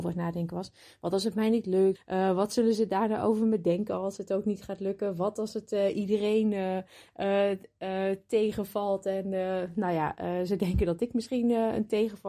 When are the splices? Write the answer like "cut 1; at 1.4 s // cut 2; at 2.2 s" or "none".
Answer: cut 1; at 1.9 s